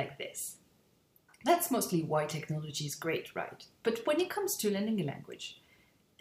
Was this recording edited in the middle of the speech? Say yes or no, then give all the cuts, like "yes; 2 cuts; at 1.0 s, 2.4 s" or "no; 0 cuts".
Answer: no; 0 cuts